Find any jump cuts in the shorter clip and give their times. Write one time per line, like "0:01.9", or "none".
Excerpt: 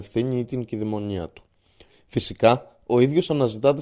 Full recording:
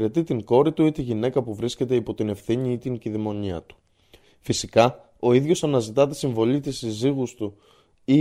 none

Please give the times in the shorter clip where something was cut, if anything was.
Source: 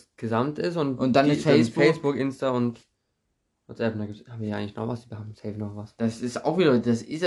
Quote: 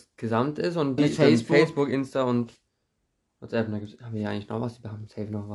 0:01.0

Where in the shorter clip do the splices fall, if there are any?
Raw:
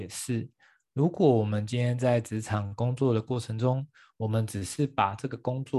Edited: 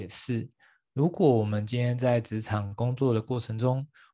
none

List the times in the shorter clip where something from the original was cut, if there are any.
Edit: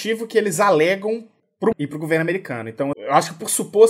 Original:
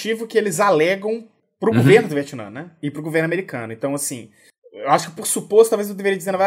0:01.7
0:02.9

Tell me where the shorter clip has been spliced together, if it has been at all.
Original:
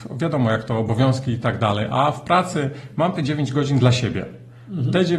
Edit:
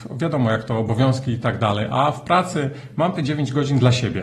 none

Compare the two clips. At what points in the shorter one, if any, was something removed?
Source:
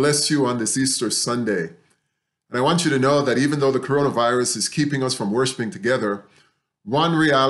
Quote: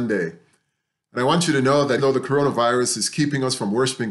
0:02.0

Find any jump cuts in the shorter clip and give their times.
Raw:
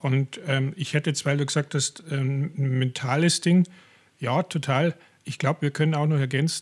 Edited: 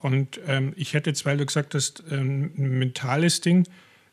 none

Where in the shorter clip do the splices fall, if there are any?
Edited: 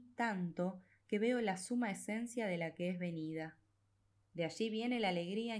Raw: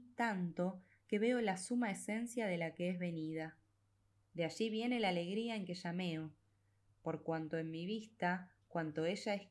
none

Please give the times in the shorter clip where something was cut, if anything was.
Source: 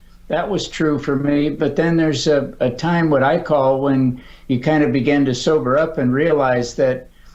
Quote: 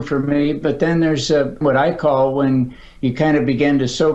0:01.6

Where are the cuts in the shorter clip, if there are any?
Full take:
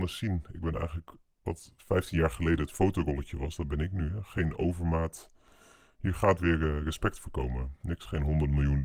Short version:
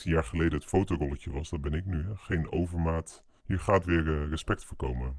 0:03.4

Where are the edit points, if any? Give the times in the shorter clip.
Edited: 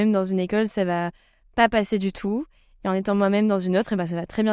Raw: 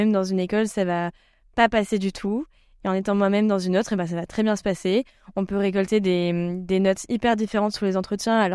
none

